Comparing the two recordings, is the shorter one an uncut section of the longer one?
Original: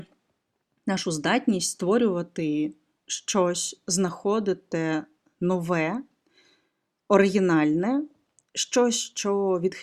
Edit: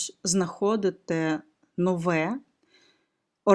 yes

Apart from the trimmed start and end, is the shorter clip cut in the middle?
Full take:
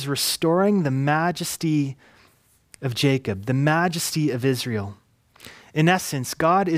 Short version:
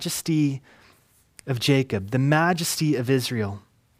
no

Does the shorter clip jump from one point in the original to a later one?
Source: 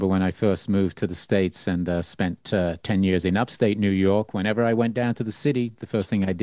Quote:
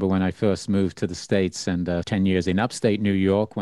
yes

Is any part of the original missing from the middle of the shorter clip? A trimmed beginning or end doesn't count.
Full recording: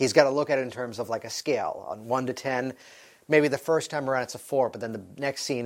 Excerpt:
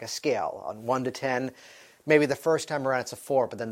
no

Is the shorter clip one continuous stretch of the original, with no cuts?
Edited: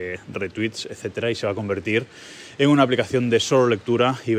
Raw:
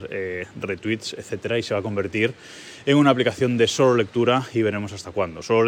yes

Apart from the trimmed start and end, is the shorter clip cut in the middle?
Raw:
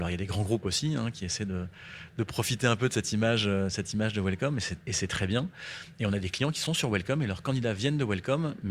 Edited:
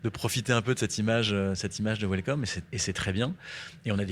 no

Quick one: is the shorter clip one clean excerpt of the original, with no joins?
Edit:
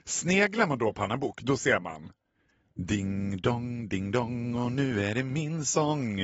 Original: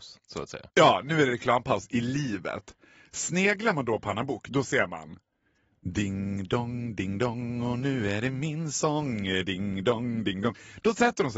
yes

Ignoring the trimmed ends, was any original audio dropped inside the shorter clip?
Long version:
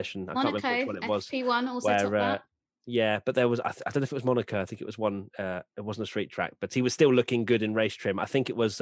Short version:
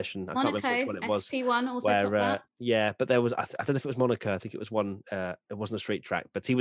yes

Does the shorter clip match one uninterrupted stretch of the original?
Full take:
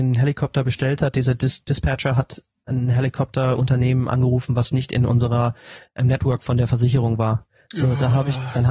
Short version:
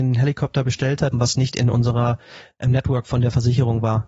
no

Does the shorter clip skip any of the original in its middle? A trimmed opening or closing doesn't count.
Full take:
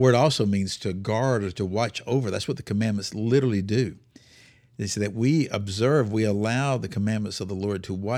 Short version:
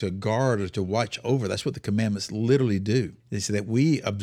yes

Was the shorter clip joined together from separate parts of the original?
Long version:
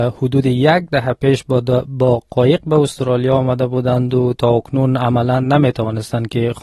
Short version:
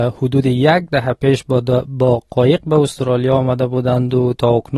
no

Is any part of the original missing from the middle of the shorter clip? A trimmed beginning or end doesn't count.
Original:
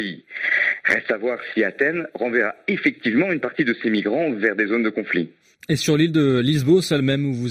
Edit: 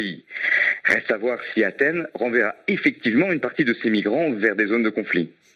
no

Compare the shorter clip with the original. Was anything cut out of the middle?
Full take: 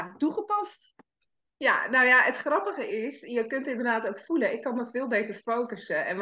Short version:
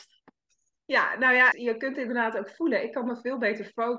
yes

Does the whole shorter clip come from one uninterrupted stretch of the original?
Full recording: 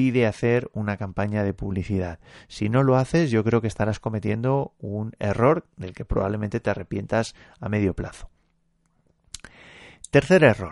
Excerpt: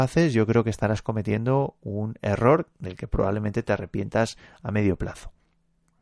yes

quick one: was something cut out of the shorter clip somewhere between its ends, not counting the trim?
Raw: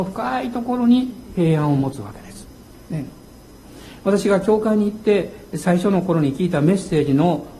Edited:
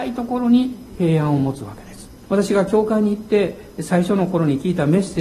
yes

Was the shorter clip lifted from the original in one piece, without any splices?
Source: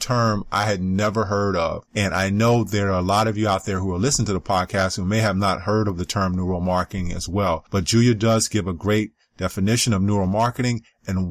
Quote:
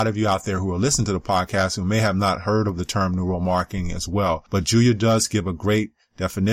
yes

